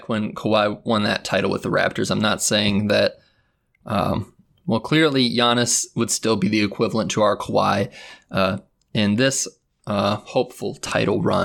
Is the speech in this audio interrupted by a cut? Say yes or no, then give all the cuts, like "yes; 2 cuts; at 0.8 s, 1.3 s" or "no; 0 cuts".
no; 0 cuts